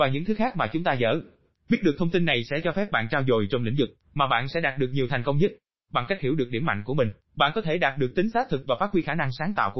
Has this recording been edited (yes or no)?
no